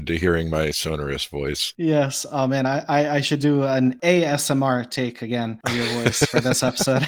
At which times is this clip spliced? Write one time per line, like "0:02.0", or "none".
none